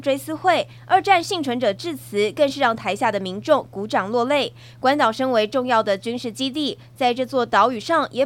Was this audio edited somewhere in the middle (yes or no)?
no